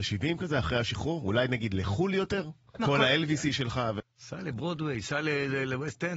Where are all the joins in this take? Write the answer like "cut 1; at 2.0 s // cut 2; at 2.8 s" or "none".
cut 1; at 2.8 s // cut 2; at 4.0 s